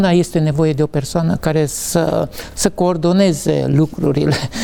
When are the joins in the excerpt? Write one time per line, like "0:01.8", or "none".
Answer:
none